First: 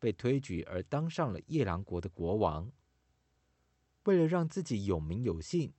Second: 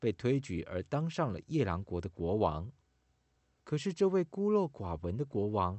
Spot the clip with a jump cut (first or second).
second